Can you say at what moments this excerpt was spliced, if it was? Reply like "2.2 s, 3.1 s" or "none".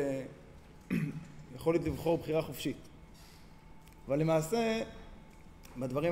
4.0 s